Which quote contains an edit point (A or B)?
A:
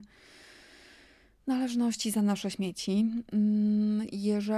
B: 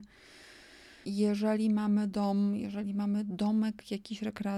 B